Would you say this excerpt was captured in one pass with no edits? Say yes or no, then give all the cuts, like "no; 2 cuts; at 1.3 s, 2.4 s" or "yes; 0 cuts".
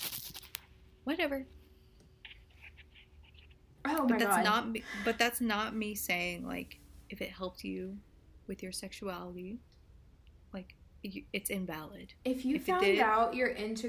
yes; 0 cuts